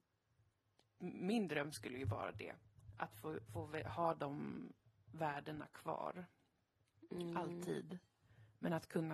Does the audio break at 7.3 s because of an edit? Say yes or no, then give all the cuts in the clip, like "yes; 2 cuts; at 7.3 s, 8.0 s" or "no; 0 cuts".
no; 1 cut; at 3.5 s